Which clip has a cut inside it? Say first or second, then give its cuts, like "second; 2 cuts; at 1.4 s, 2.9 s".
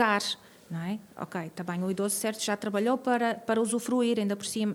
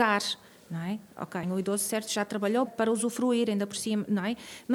second; 2 cuts; at 1.4 s, 2.7 s